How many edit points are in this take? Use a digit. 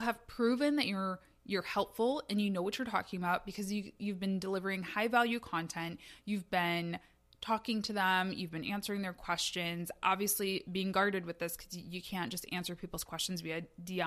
0